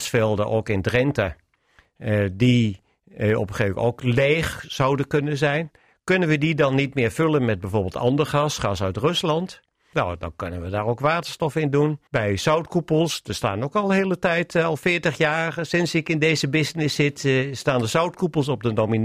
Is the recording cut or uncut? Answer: cut